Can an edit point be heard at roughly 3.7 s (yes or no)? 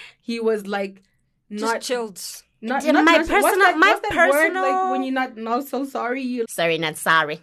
no